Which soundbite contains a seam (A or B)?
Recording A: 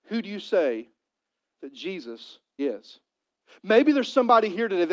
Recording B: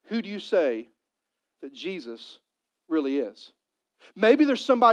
A